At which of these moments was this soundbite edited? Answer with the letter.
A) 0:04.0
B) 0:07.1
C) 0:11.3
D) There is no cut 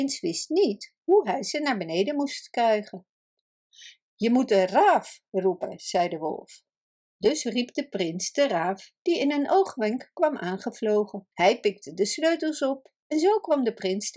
C